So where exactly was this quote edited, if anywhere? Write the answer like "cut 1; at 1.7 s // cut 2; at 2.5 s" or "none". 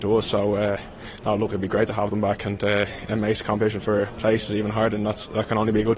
none